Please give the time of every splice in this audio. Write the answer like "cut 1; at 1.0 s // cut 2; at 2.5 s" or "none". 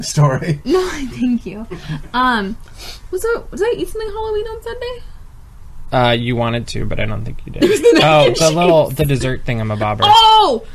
none